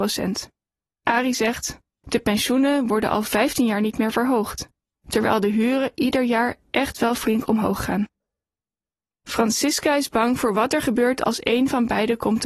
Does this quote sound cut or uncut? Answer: cut